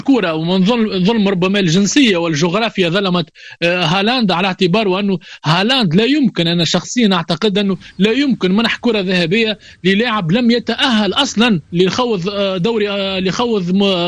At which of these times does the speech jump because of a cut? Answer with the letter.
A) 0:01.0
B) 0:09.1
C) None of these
C